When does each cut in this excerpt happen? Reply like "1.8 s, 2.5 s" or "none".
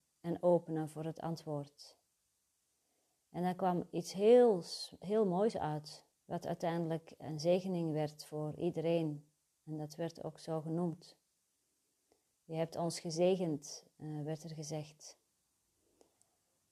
6.1 s